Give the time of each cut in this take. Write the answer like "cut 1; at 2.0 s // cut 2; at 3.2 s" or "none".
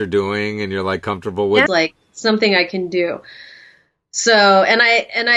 cut 1; at 1.7 s